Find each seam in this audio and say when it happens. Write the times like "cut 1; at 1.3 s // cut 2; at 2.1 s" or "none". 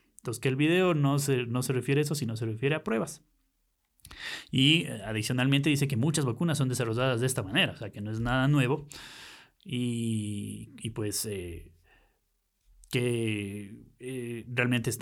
none